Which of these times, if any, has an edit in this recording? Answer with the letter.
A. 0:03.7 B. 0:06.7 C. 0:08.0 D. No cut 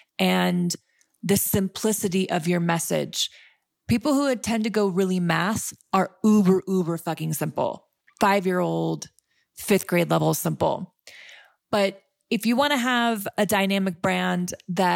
C